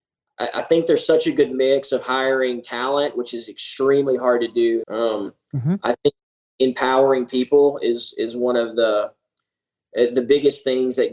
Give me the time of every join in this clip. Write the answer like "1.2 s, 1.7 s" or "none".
4.8 s